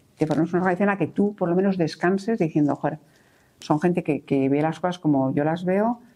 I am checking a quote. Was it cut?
no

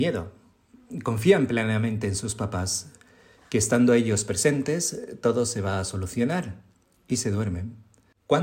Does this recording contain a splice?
no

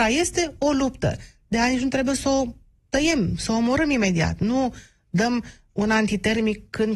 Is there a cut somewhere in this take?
no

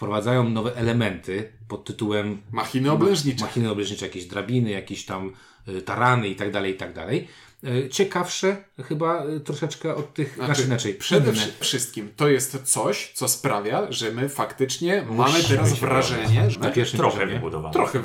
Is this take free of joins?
no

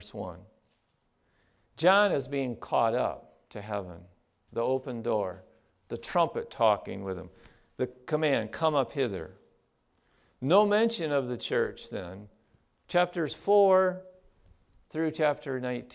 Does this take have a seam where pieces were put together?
no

